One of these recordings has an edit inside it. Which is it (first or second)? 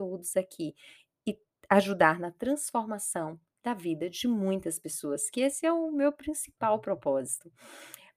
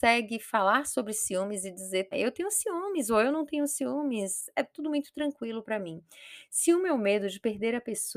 second